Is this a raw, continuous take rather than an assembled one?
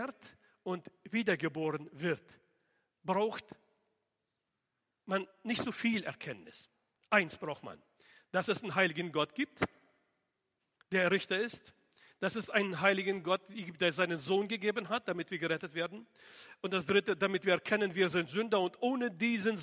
yes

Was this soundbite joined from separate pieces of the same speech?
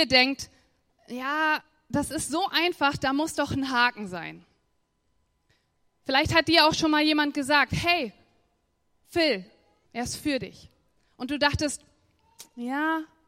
yes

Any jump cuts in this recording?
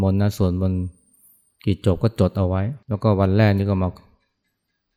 yes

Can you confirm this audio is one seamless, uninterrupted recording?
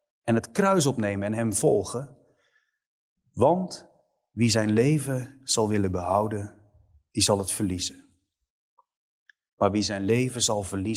yes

